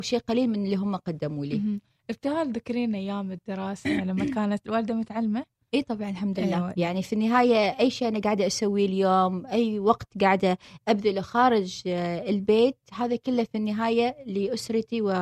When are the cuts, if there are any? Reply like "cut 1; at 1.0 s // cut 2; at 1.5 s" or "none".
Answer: cut 1; at 4.6 s // cut 2; at 6.8 s